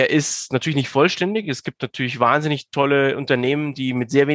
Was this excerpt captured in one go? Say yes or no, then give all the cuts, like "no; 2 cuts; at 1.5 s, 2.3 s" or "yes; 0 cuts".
yes; 0 cuts